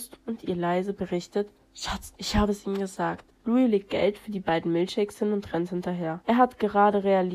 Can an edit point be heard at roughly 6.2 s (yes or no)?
yes